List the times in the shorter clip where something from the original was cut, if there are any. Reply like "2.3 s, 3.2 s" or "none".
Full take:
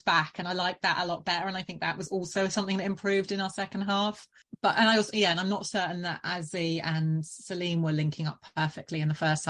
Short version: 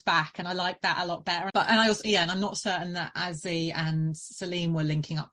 1.5 s